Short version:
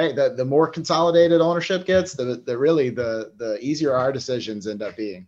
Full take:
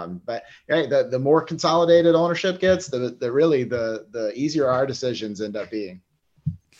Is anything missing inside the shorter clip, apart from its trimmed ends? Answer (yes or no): no